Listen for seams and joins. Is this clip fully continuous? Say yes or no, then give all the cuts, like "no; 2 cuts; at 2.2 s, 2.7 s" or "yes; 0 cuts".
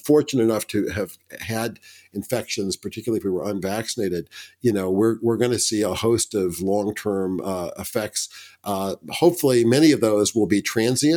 yes; 0 cuts